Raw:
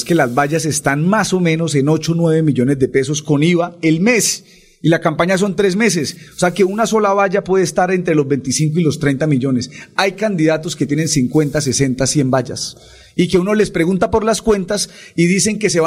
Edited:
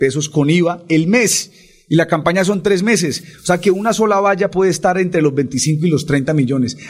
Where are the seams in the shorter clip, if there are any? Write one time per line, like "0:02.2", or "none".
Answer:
none